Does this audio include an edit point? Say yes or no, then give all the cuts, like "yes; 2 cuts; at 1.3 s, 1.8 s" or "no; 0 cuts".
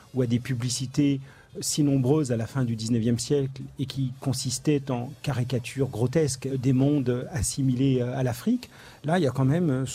yes; 2 cuts; at 1.5 s, 6.5 s